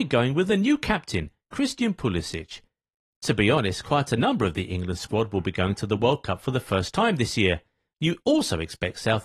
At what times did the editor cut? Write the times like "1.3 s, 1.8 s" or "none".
3.1 s, 7.9 s